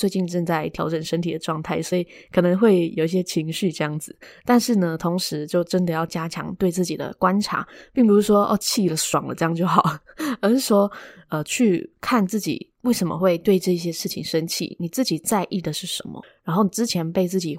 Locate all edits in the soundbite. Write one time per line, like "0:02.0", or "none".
none